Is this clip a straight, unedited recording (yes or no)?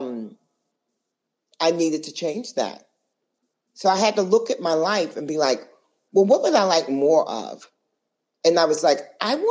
yes